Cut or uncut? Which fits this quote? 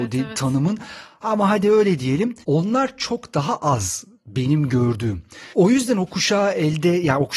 uncut